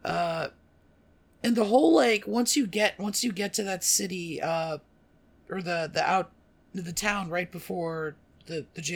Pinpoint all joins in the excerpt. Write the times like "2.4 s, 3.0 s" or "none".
none